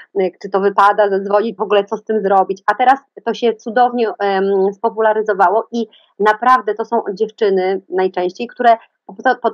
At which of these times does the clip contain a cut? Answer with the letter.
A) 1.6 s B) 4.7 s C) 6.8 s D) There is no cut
A